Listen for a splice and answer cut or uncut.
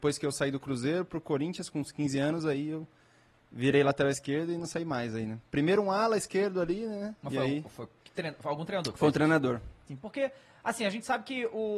cut